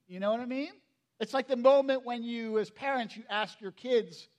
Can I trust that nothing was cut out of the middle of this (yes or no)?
no